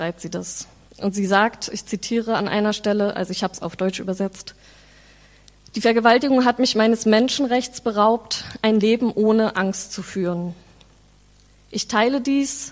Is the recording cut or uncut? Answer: uncut